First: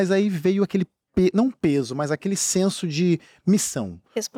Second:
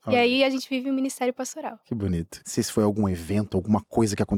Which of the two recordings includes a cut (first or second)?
second